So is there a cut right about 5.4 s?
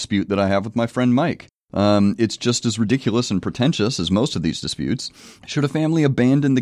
yes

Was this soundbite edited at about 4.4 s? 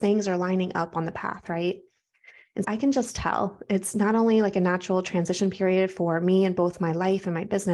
no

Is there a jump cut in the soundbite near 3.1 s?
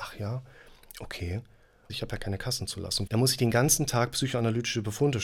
yes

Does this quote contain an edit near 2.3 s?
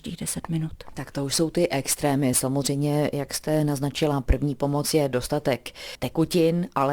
no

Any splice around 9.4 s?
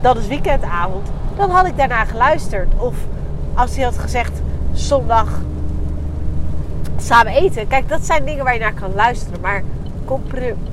no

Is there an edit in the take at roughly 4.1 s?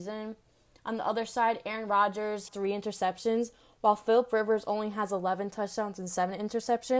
no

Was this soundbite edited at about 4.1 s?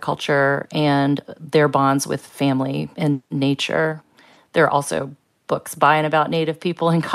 no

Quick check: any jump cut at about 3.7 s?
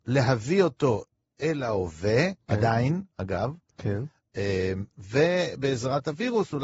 no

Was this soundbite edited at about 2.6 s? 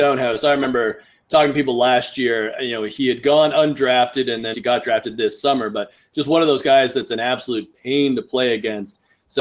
no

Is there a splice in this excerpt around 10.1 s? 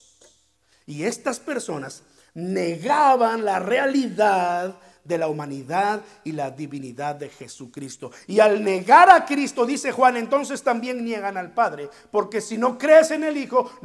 no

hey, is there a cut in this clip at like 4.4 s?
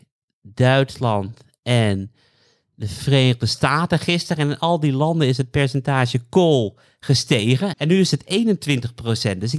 no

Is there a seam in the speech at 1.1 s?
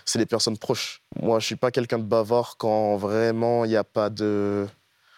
yes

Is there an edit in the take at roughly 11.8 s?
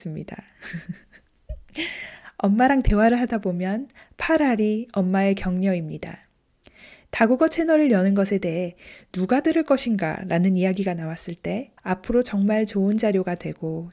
yes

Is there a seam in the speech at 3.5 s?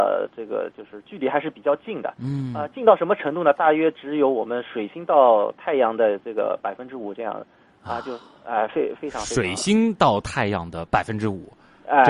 no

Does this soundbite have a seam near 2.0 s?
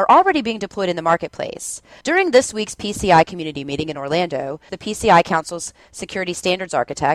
yes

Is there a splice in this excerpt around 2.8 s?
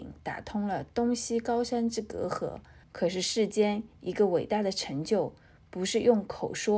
yes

